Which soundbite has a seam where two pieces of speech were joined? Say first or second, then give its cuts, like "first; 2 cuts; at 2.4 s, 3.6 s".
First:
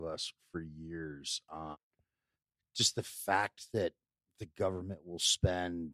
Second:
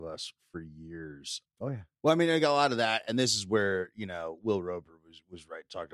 second; 1 cut; at 1.5 s